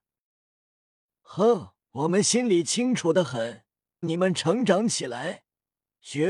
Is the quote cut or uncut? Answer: cut